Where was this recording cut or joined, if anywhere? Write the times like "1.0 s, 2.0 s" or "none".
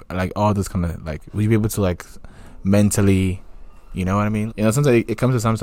4.5 s